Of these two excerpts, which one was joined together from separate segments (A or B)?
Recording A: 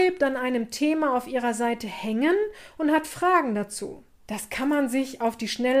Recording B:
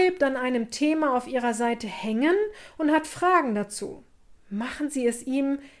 A